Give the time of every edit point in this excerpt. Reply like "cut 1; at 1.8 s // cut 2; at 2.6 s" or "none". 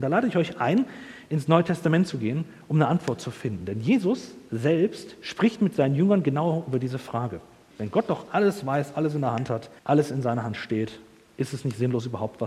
cut 1; at 7.7 s // cut 2; at 9.8 s